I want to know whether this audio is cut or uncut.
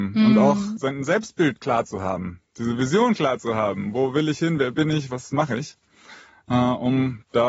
uncut